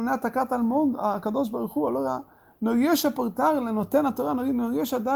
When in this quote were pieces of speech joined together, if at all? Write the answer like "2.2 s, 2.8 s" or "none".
none